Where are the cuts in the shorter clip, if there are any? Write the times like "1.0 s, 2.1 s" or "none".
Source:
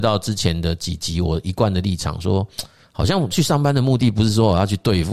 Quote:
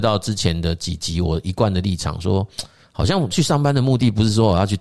none